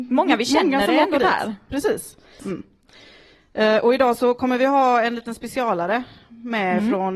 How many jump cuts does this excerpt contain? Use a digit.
1